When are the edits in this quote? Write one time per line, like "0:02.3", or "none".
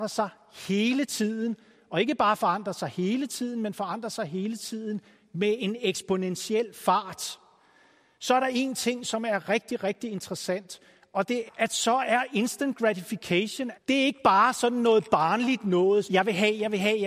0:11.5
0:13.7
0:16.0